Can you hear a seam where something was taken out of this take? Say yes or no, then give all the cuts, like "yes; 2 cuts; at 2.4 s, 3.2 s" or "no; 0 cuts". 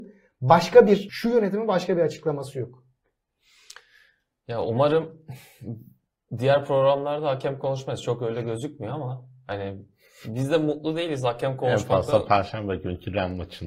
yes; 1 cut; at 1.1 s